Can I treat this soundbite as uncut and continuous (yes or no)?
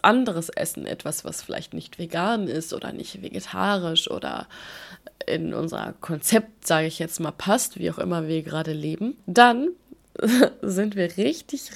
yes